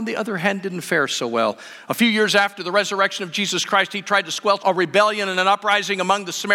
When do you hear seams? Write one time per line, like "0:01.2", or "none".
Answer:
0:04.6